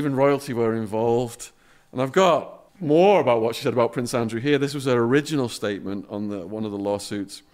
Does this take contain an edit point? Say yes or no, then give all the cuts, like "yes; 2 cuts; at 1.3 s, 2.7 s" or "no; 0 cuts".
yes; 1 cut; at 2.7 s